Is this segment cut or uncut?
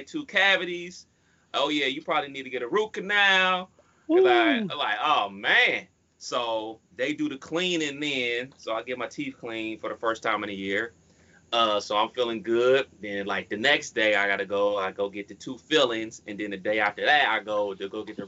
uncut